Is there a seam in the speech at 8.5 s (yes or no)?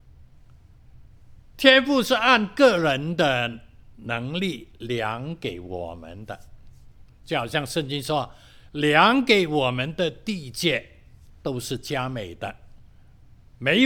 no